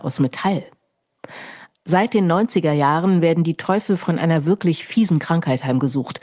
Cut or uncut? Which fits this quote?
cut